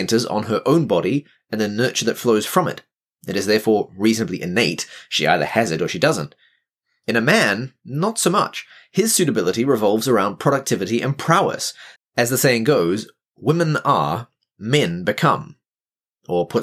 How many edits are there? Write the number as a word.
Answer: one